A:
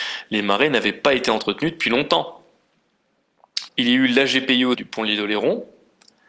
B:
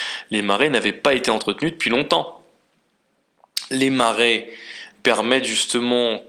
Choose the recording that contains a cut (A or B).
A